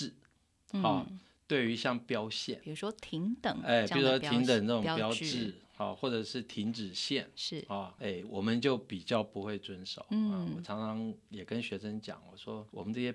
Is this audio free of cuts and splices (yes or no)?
no